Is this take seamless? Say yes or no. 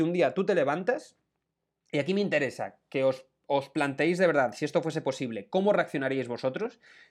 yes